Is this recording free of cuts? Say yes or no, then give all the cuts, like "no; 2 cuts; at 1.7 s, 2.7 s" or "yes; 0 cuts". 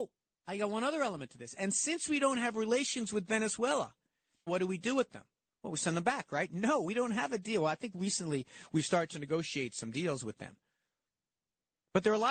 no; 1 cut; at 4.5 s